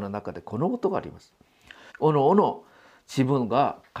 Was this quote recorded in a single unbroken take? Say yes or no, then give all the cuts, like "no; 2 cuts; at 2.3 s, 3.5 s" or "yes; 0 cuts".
no; 1 cut; at 1.9 s